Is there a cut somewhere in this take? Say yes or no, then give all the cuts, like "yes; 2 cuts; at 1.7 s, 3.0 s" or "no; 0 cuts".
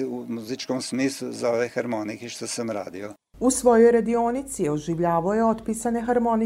no; 0 cuts